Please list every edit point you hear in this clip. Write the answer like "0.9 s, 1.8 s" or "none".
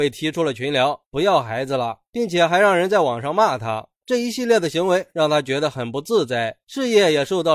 1.0 s, 4.0 s